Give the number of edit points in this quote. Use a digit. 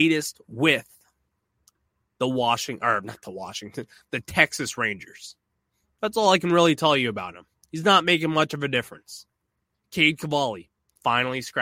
1